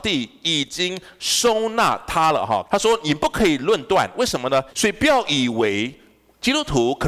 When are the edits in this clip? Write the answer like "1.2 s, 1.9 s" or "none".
2.7 s, 4.7 s